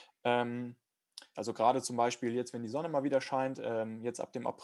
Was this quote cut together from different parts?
yes; 1 cut; at 1.3 s

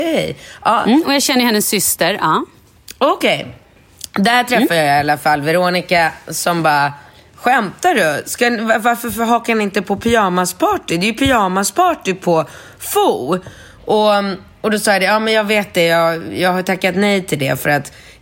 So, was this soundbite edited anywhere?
no; 0 cuts

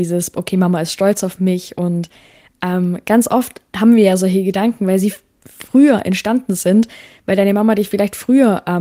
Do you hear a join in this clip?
no; 0 cuts

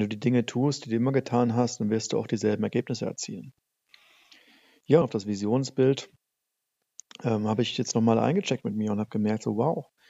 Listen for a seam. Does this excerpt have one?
yes; 1 cut; at 5.0 s

